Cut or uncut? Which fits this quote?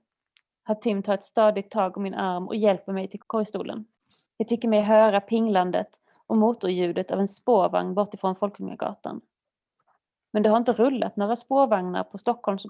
cut